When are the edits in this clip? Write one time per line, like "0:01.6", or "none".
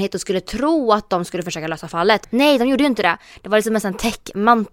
0:02.2